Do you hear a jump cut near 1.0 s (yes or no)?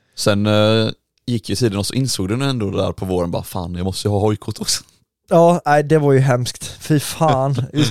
no